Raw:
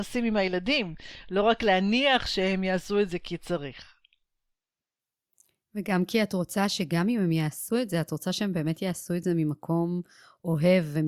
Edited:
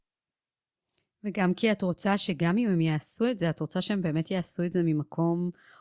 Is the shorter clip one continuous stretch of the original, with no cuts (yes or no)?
yes